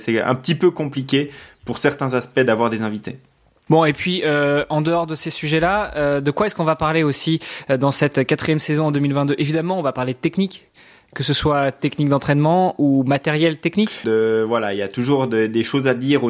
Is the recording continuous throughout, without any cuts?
no; 2 cuts; at 3.7 s, 14.0 s

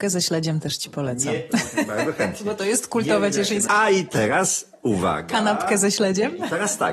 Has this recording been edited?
yes; 1 cut; at 3.7 s

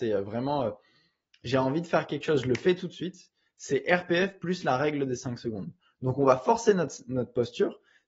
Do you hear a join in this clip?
no; 0 cuts

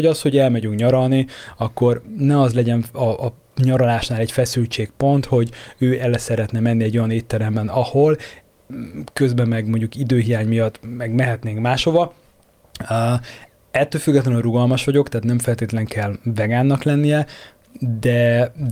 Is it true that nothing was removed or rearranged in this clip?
yes; 0 cuts

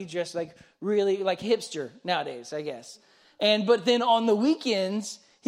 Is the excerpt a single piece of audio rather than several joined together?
yes; 0 cuts

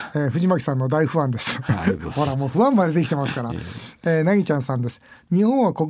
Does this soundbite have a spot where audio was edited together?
no; 0 cuts

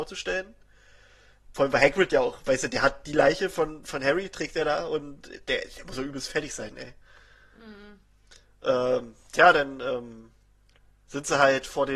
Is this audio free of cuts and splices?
yes; 0 cuts

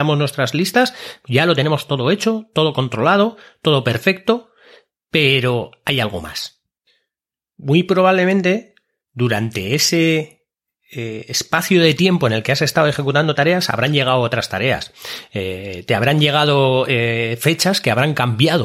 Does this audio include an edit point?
no; 0 cuts

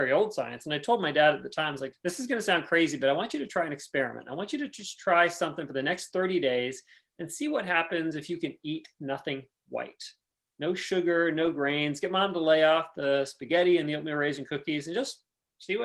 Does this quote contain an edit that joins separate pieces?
yes; 1 cut; at 1.9 s

